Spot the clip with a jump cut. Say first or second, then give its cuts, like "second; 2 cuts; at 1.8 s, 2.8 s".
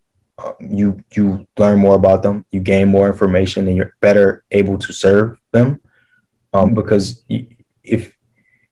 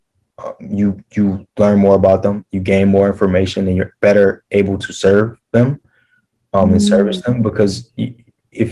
first; 1 cut; at 6.7 s